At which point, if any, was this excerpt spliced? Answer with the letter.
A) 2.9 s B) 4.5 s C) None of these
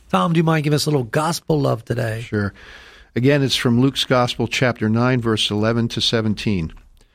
C